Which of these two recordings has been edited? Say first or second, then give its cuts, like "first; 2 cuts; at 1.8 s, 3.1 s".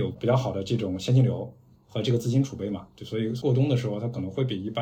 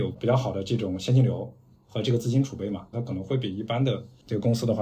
second; 1 cut; at 2.9 s